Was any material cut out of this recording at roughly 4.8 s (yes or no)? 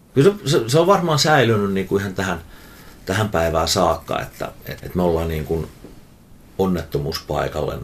yes